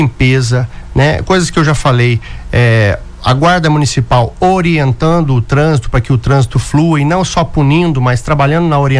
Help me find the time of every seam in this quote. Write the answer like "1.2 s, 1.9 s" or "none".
none